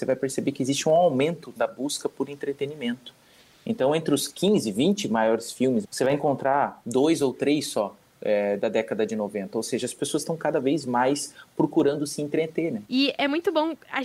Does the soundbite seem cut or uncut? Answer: cut